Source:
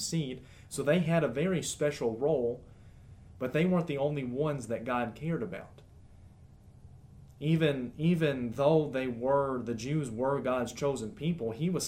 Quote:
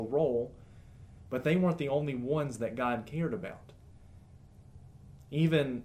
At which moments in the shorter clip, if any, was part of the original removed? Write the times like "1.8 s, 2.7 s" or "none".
none